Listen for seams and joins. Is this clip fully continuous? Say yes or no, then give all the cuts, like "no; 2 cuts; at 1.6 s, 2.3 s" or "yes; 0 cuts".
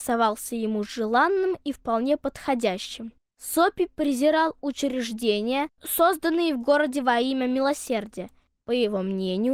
yes; 0 cuts